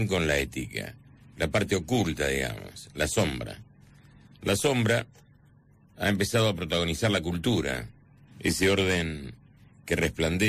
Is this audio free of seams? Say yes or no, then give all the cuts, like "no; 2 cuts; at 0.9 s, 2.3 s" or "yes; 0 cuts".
no; 2 cuts; at 1.2 s, 8.3 s